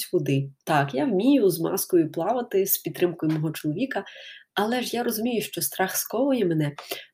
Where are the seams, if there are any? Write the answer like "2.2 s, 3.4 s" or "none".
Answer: none